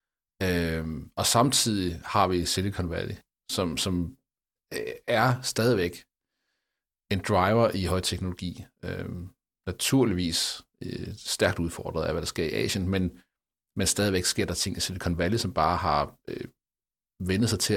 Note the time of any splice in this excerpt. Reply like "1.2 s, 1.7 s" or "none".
none